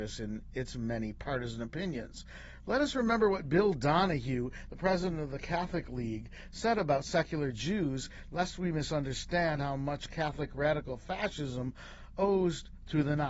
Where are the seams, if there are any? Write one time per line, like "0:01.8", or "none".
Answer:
none